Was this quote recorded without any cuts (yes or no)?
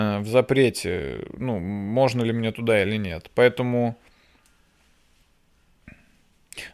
yes